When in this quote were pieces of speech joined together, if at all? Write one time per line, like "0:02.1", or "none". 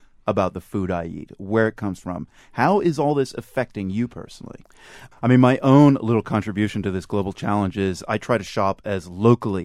0:05.1